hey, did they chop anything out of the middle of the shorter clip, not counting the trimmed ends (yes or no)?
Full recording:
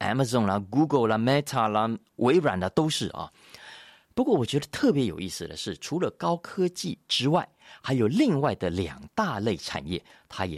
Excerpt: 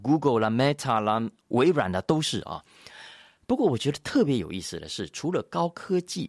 no